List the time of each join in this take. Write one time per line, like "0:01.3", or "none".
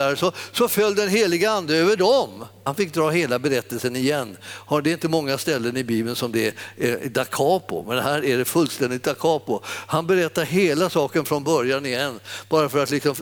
0:02.7